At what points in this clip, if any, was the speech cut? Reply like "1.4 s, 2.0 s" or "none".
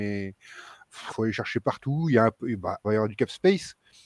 1.1 s, 2.8 s